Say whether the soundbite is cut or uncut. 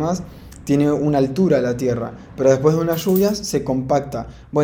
uncut